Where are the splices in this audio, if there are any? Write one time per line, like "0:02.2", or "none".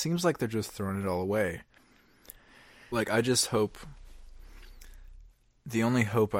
0:02.9